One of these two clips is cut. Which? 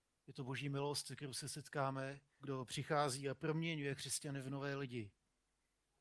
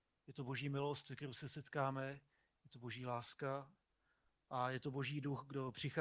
first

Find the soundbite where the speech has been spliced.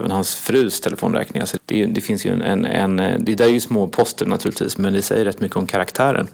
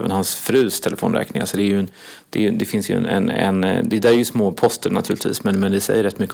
first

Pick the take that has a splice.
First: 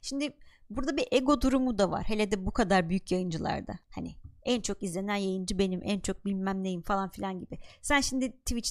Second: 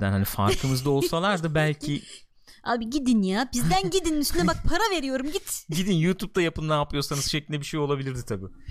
first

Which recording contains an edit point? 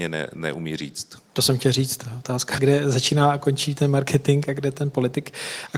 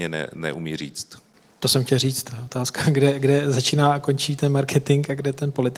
first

